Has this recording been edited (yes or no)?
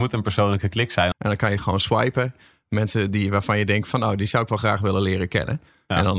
yes